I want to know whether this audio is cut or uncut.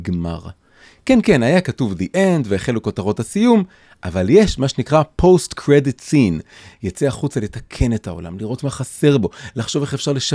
cut